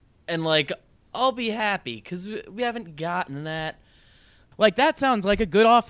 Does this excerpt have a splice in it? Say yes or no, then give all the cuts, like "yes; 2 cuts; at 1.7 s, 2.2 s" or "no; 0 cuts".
yes; 1 cut; at 4.5 s